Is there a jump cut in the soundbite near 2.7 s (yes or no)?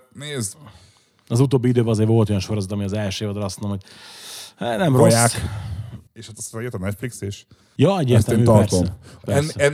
no